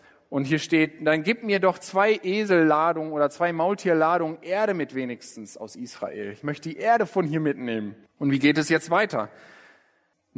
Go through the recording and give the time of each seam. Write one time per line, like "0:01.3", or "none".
0:08.1